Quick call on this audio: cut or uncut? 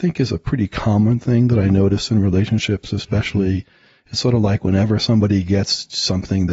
uncut